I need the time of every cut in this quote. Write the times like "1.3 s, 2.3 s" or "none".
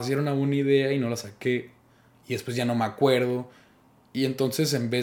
none